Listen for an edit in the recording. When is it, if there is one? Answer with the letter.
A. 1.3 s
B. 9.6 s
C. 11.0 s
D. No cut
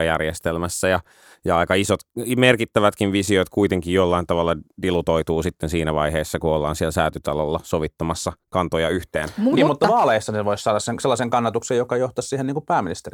B